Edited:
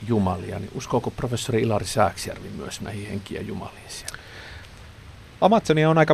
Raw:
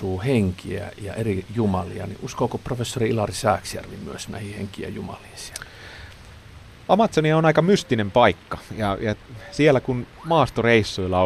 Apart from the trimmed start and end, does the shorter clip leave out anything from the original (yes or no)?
no